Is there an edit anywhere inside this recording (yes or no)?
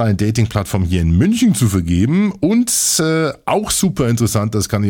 no